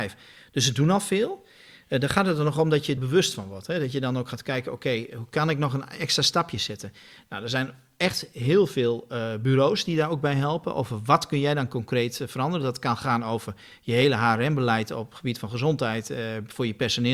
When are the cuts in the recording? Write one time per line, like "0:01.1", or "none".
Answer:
0:03.0

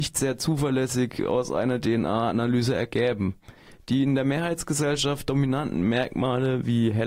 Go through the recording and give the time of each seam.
none

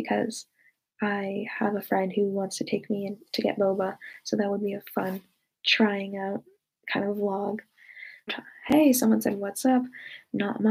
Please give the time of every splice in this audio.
0:08.3

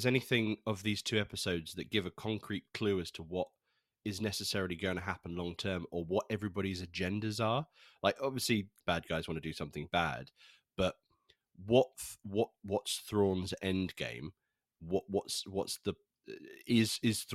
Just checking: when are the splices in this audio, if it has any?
0:08.8

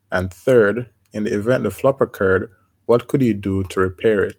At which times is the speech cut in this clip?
none

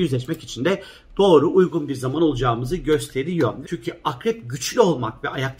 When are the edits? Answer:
0:03.6

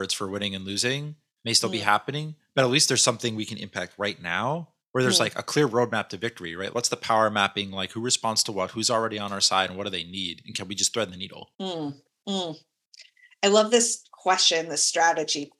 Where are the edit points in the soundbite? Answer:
0:06.7
0:11.5

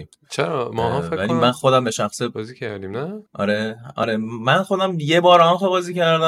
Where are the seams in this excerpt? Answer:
0:03.3

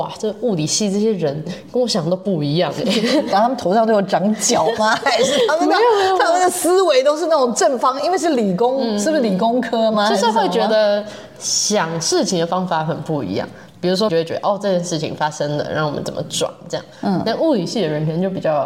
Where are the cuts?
0:03.3
0:14.1

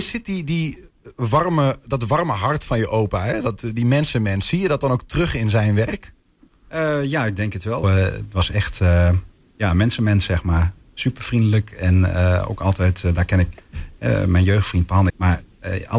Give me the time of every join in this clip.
0:07.8
0:15.1

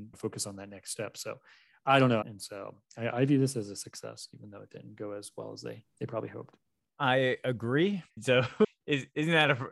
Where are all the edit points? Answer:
0:02.2
0:08.1

